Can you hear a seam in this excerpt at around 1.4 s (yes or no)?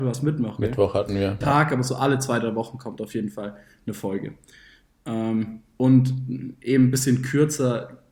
yes